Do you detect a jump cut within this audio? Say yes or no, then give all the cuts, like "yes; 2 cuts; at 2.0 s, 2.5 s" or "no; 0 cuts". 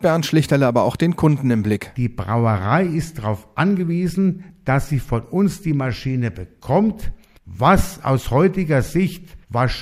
no; 0 cuts